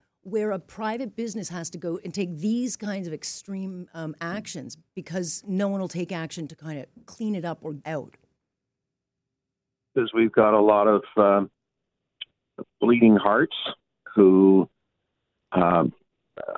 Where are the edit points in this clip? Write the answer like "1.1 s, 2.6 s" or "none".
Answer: 7.8 s